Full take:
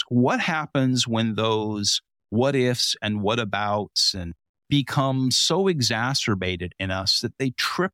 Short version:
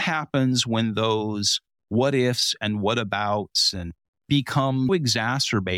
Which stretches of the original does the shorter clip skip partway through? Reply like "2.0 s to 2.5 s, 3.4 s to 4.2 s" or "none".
5.3 s to 5.6 s